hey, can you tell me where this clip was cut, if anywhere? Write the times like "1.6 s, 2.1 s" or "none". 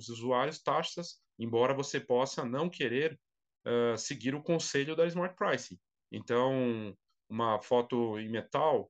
1.3 s, 5.9 s